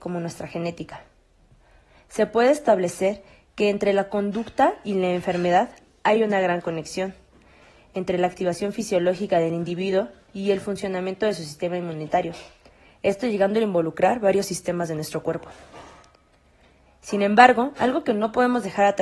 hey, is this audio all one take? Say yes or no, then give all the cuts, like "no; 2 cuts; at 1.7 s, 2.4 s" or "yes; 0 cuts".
yes; 0 cuts